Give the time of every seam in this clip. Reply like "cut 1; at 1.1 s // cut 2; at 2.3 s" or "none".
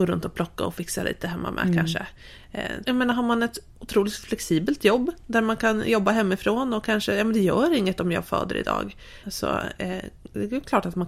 cut 1; at 2.8 s // cut 2; at 9.2 s